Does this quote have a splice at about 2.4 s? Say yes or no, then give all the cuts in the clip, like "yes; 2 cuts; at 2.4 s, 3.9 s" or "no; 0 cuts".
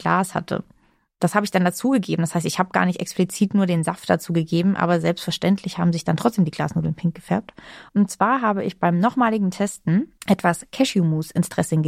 no; 2 cuts; at 7.9 s, 10.2 s